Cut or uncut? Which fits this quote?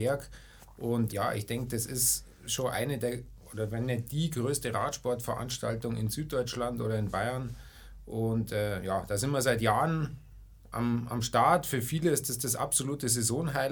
cut